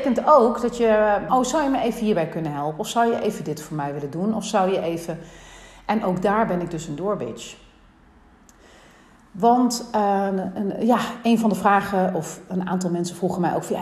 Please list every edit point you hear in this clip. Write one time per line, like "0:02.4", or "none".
0:01.3